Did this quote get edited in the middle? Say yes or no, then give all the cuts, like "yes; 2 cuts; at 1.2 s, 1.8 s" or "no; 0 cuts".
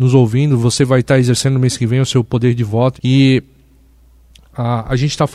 yes; 1 cut; at 3.0 s